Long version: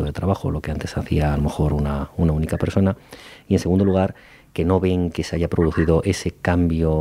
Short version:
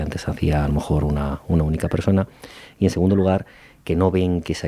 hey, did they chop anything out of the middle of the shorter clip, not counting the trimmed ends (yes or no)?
no